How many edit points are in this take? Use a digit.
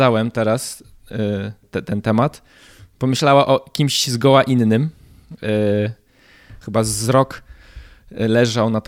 2